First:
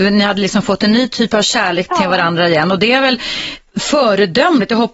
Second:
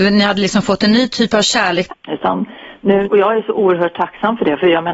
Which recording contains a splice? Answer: second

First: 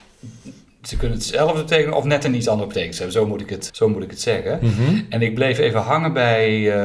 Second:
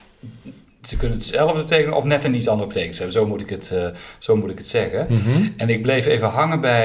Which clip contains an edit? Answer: first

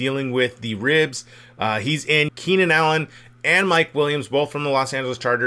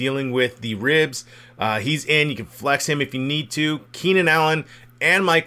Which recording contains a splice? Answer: first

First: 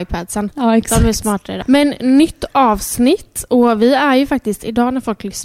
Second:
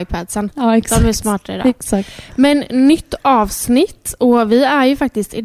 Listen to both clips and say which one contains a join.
first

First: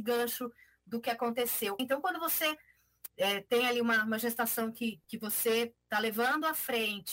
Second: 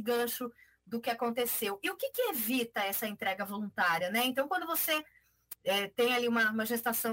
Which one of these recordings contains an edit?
first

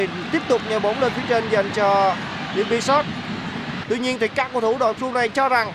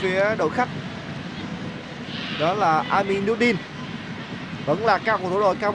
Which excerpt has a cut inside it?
first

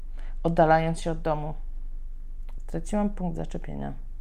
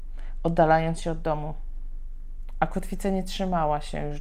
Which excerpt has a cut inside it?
first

